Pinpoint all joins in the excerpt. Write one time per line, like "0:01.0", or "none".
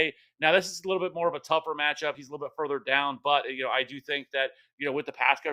none